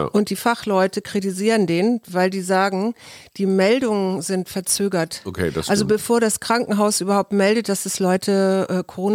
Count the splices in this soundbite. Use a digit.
0